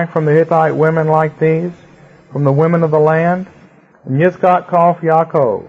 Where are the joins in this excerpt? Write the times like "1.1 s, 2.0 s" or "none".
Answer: 3.9 s